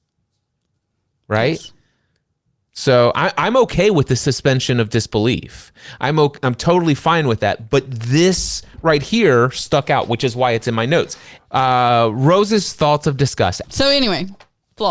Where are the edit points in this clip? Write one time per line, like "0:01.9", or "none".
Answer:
0:11.4
0:13.6